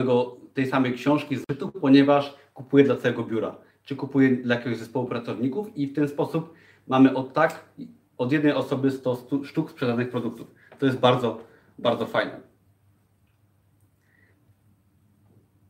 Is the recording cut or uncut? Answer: uncut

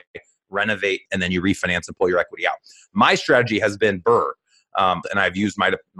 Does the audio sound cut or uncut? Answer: cut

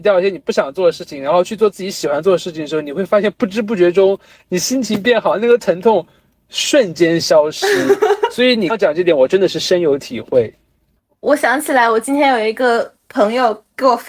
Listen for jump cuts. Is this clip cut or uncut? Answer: cut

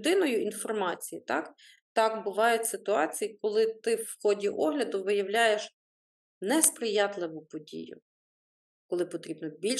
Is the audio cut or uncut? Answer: uncut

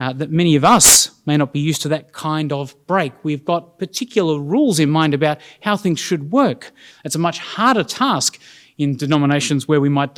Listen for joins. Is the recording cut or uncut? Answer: cut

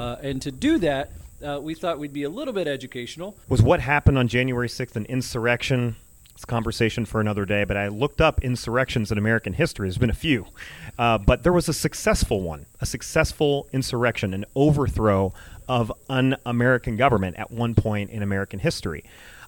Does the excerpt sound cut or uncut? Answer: cut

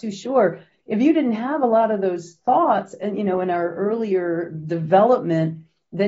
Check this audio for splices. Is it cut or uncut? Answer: uncut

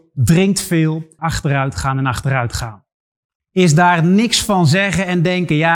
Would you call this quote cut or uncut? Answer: cut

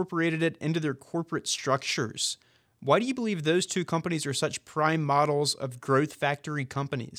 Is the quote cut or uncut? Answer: uncut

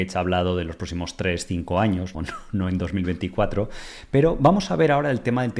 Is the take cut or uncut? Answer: cut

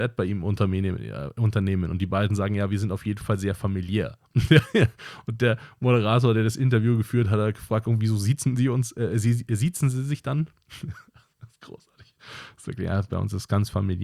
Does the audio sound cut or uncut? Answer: uncut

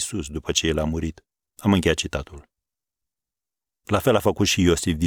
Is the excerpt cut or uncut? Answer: cut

